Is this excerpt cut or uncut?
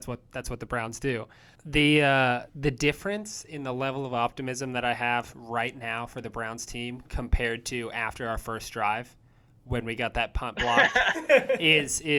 cut